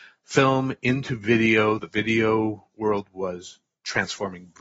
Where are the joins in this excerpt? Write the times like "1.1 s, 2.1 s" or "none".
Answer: none